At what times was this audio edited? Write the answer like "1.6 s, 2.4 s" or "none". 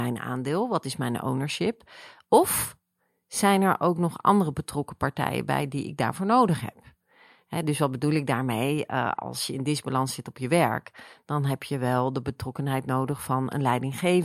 none